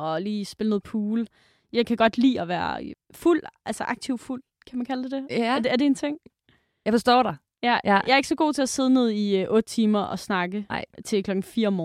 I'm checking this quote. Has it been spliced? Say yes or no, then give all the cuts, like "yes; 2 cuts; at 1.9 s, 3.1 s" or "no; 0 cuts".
yes; 1 cut; at 2.9 s